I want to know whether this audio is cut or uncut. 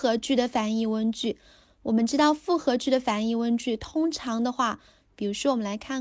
cut